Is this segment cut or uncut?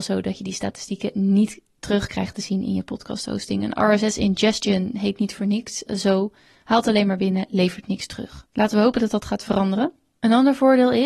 uncut